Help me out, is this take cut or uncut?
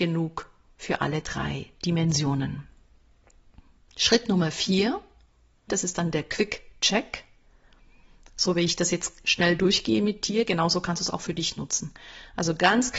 cut